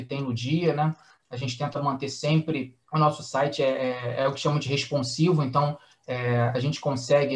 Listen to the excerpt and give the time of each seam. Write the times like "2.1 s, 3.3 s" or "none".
2.8 s